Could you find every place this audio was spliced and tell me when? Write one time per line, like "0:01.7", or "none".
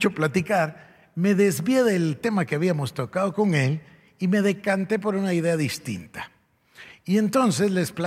none